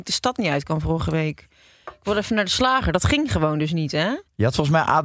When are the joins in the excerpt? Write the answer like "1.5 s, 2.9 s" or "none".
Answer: none